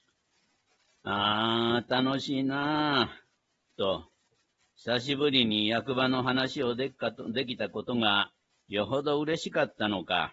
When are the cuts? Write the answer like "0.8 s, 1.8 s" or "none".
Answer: 3.7 s